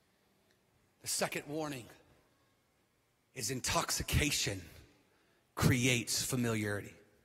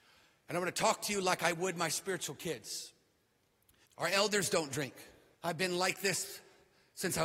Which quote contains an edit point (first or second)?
second